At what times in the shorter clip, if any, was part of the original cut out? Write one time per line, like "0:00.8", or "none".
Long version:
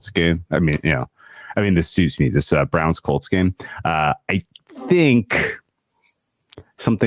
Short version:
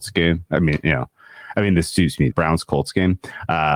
0:02.3